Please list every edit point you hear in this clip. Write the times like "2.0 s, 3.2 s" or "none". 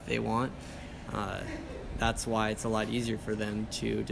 1.1 s